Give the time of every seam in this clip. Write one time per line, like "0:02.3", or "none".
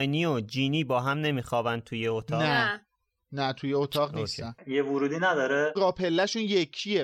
none